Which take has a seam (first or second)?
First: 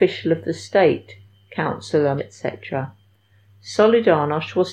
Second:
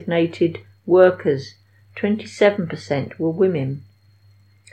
first